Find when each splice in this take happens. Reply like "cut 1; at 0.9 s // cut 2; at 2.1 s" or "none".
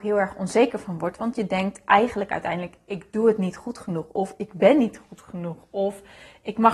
none